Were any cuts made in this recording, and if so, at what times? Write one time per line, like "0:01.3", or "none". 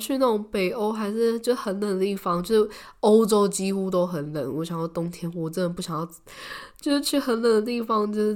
none